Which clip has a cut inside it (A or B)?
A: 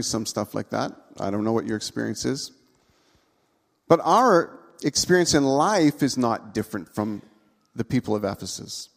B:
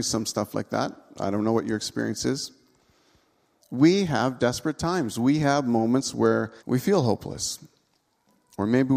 B